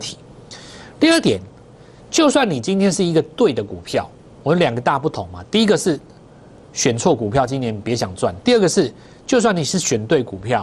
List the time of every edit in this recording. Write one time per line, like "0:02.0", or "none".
none